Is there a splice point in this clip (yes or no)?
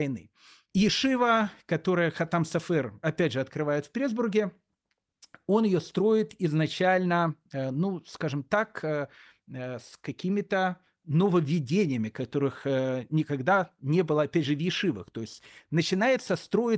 no